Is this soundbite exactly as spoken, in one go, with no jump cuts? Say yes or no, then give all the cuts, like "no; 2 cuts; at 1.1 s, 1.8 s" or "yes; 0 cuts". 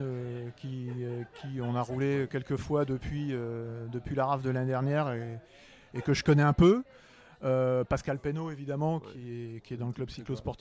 yes; 0 cuts